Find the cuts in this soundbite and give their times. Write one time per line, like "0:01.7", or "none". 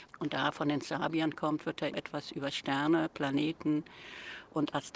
0:01.9

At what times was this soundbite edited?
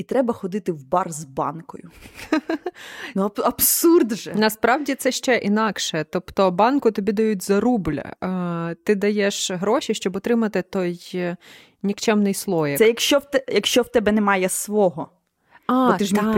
none

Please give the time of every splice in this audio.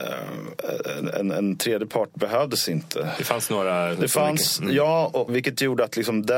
0:03.2
0:05.3

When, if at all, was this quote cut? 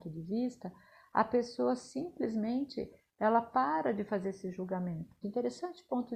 0:05.2

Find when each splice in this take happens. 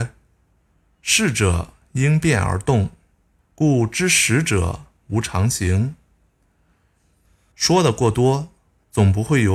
0:03.4
0:07.5

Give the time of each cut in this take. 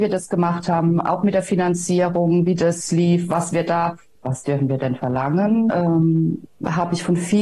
0:04.2
0:05.7

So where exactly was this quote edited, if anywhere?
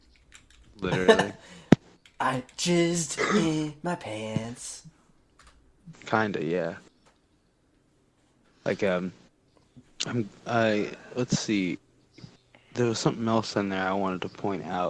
0:05.9

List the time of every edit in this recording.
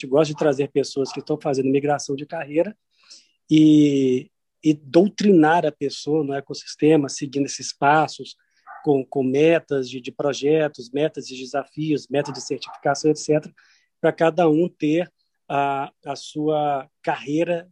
none

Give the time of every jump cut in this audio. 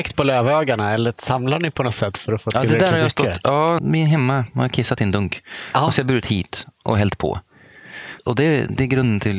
0:03.8
0:08.2

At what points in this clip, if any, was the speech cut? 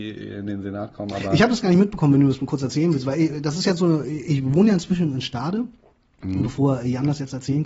none

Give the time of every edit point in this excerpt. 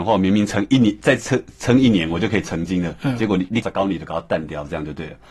0:03.6

